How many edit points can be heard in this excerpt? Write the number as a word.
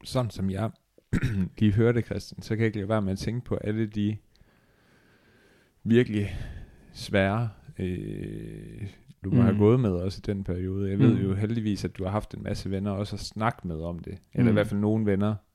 one